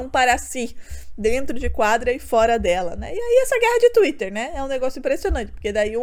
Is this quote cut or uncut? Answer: uncut